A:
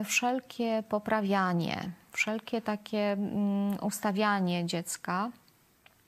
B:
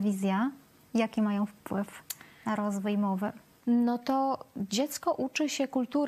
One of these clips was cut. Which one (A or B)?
B